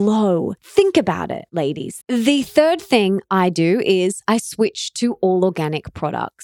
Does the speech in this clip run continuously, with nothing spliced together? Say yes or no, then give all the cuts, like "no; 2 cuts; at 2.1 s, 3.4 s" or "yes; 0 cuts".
no; 1 cut; at 2.0 s